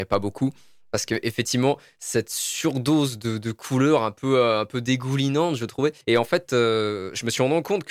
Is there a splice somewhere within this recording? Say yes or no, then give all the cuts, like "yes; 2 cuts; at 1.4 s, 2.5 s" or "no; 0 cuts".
yes; 1 cut; at 6.0 s